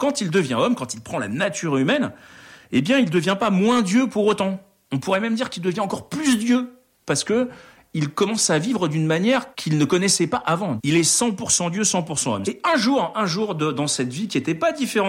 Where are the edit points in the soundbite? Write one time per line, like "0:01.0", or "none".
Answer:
0:09.5
0:10.8
0:12.4